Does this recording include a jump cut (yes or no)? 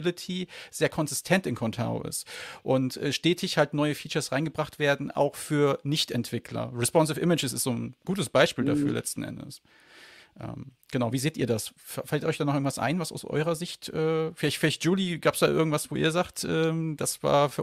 no